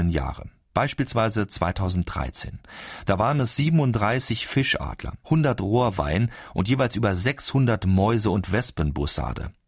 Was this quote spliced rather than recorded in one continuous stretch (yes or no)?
yes